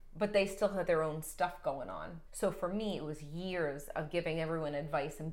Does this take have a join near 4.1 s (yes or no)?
no